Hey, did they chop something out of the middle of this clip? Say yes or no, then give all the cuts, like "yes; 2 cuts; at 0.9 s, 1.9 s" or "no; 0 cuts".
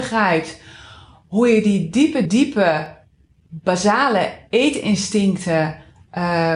yes; 1 cut; at 2.3 s